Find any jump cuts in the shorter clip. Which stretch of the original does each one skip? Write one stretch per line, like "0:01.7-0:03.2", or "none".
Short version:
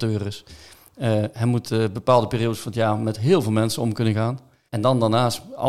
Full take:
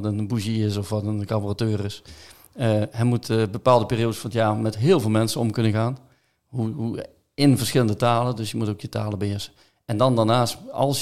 0:06.3-0:09.8